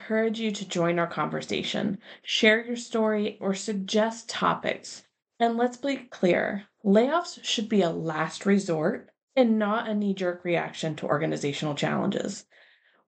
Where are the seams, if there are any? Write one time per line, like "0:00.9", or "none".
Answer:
0:03.4
0:05.2